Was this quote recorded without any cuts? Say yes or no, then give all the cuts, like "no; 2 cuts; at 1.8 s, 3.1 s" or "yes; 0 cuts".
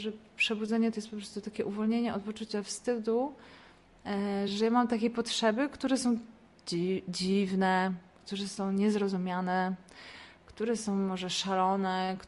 yes; 0 cuts